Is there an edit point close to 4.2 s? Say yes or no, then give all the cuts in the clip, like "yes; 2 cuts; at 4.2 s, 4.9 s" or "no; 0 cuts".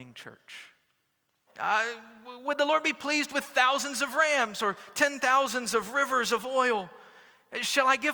no; 1 cut; at 1.5 s